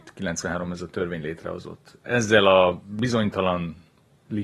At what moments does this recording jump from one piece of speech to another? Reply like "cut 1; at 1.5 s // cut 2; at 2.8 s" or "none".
none